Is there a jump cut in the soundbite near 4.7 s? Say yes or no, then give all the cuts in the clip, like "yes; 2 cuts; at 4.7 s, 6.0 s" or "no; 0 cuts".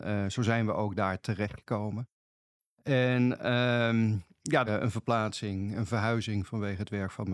yes; 1 cut; at 4.7 s